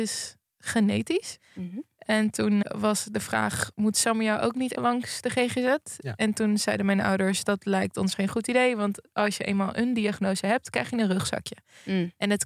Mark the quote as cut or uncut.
cut